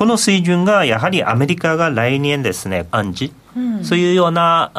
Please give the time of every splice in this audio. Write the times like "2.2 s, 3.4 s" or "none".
2.9 s